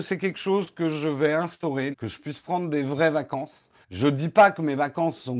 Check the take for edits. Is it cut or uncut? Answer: cut